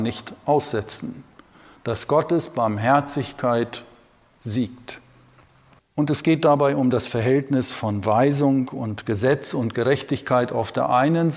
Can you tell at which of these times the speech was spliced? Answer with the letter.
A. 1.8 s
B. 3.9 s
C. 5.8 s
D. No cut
C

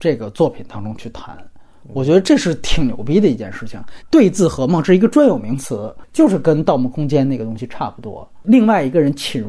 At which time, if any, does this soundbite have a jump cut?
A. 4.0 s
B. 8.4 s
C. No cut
A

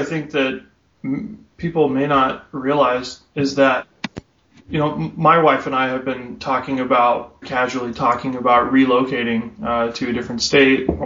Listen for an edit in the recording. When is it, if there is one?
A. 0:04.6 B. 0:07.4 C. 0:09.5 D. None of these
B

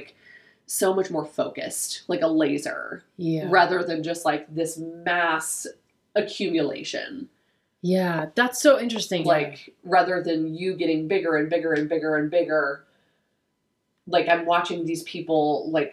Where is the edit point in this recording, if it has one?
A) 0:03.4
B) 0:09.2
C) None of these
B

